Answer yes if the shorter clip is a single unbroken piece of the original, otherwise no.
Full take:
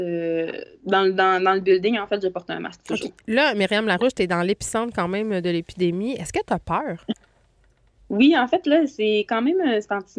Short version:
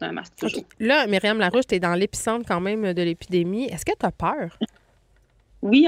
yes